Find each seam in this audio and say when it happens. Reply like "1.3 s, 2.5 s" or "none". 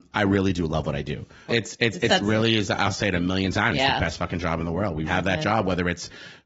1.5 s, 5.1 s

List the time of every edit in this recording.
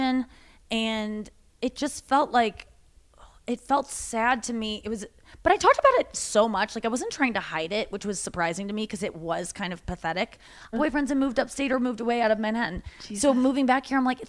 10.7 s

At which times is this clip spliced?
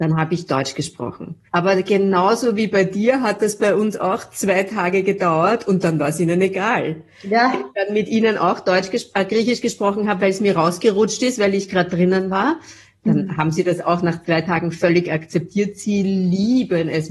1.5 s

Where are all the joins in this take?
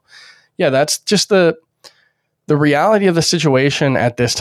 none

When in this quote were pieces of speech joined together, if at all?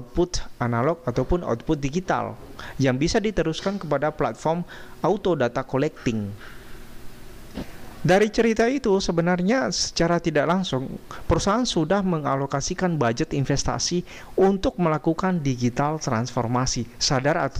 none

